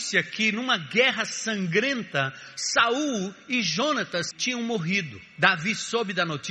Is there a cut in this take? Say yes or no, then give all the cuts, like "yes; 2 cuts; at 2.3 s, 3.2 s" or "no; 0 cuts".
yes; 1 cut; at 4.3 s